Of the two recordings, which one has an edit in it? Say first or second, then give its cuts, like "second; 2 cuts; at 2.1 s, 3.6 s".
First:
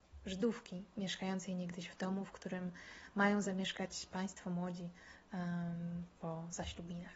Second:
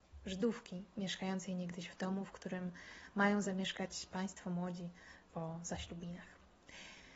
second; 1 cut; at 5.3 s